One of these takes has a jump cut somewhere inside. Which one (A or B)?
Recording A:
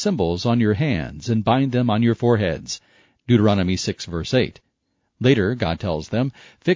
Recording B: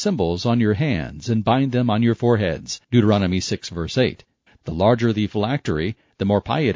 B